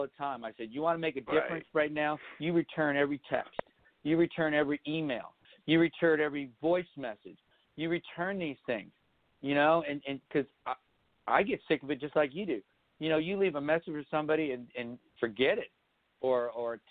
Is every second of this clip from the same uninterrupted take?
yes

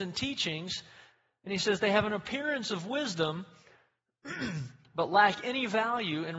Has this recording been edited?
no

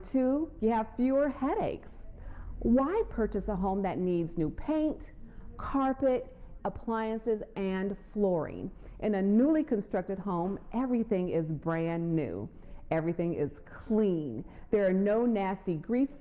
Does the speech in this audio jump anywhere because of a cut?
yes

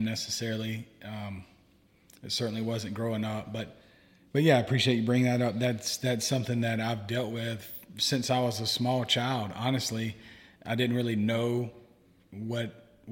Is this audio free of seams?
yes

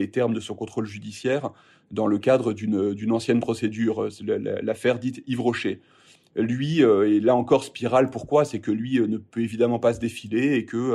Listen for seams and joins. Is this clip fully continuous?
yes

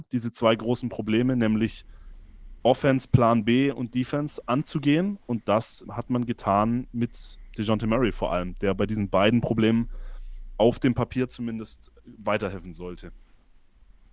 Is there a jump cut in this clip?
yes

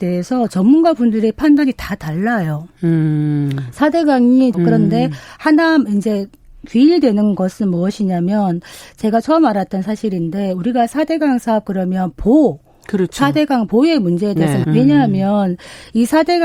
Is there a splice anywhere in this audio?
yes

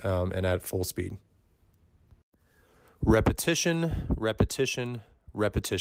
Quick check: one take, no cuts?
yes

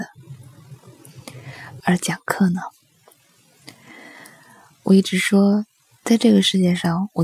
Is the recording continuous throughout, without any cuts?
no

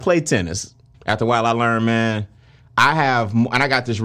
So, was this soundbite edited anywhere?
yes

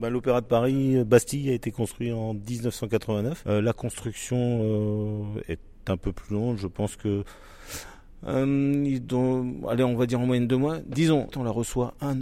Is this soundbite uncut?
no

